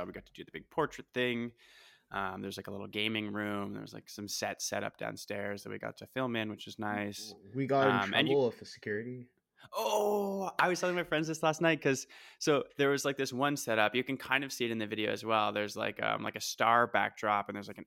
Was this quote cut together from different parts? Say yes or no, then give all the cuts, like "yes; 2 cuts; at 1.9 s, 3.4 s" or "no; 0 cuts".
no; 0 cuts